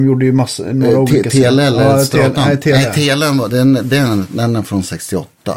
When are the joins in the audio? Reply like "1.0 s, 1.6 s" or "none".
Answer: none